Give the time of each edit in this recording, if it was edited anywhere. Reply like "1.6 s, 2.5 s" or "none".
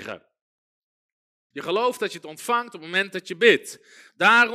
1.5 s